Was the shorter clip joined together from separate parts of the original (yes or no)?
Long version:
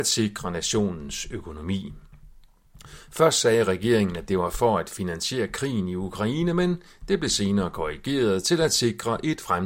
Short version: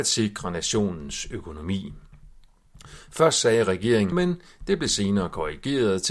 yes